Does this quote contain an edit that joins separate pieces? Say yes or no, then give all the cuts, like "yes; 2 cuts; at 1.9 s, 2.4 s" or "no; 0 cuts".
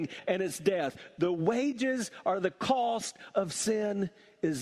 no; 0 cuts